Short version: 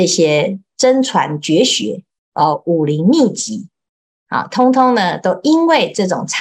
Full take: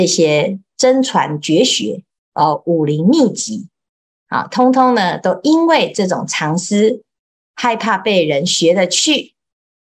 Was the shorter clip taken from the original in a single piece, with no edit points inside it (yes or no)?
yes